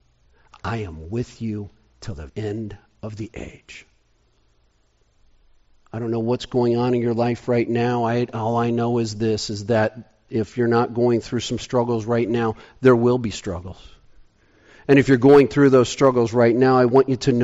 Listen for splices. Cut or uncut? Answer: cut